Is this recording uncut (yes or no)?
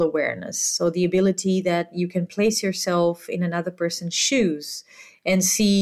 yes